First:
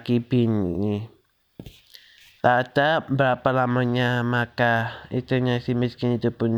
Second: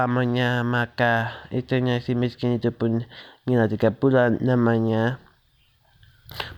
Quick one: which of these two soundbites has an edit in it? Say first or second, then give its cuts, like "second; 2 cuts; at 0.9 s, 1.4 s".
first; 1 cut; at 2.4 s